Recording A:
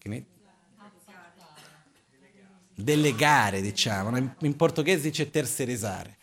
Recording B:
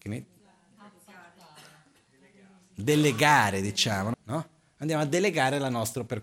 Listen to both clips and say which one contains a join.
B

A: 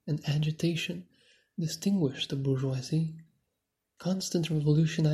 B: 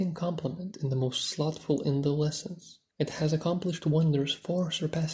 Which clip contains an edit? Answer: B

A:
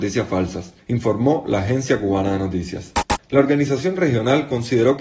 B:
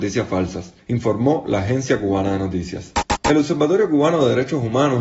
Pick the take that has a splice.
A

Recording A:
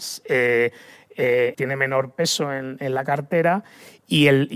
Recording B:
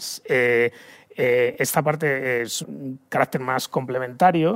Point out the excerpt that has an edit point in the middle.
A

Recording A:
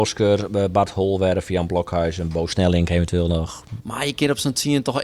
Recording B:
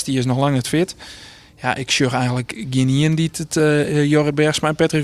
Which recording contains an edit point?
A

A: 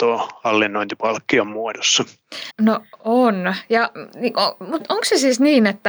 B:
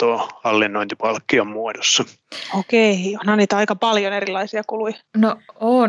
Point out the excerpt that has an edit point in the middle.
A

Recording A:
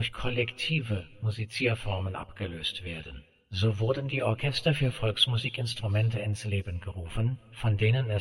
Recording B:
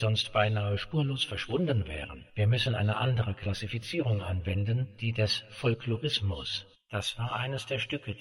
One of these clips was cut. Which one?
B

